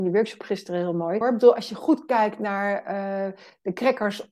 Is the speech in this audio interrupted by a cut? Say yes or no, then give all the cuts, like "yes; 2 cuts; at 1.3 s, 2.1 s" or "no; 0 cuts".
yes; 1 cut; at 1.2 s